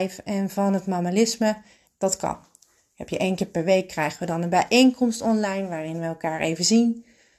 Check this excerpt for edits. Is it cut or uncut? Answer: cut